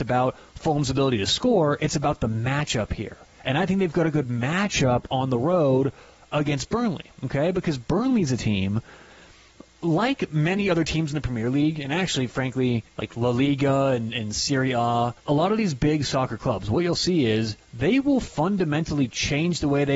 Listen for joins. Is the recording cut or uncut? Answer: cut